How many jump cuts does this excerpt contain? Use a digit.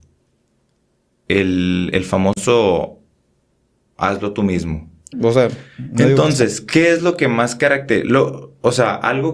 1